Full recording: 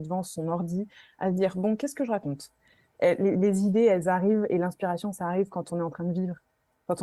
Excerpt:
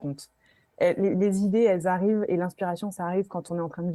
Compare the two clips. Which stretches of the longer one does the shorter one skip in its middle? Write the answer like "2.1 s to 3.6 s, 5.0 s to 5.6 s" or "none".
none